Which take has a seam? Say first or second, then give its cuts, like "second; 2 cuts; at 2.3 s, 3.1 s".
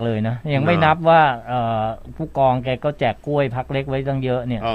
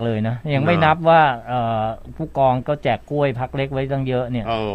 second; 1 cut; at 2.6 s